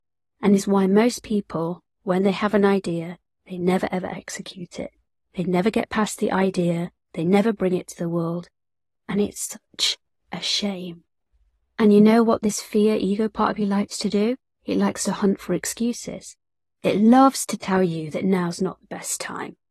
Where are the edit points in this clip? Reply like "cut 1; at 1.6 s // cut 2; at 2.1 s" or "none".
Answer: none

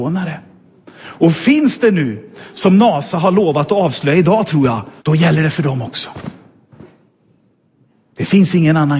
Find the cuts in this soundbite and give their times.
cut 1; at 5.0 s

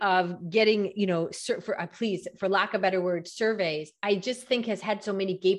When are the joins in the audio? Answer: none

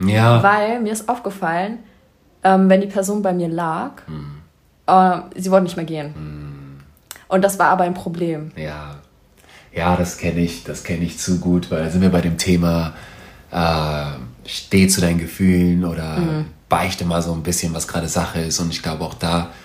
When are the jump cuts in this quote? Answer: none

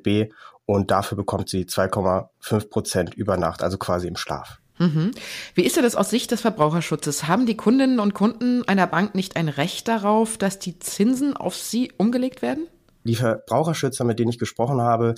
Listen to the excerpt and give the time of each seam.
none

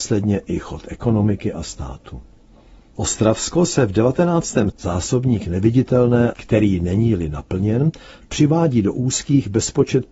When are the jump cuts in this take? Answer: cut 1; at 4.7 s // cut 2; at 6.3 s

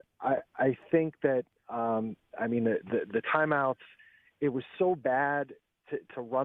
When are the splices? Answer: none

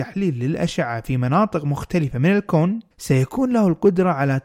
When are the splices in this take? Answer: cut 1; at 2.9 s

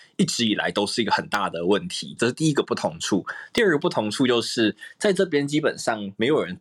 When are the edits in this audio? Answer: cut 1; at 2.2 s

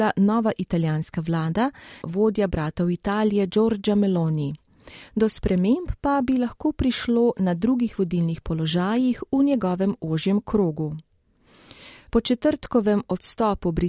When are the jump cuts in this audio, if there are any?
cut 1; at 2.0 s // cut 2; at 5.1 s // cut 3; at 12.1 s

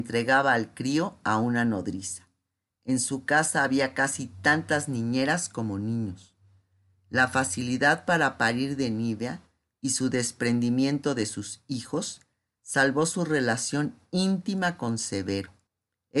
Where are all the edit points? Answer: cut 1; at 9.7 s

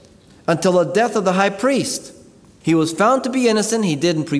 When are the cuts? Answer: cut 1; at 2.6 s

